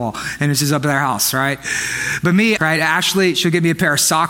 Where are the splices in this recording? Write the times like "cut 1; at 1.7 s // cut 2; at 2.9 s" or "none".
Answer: cut 1; at 2.6 s